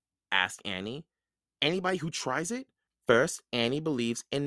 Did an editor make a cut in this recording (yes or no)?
yes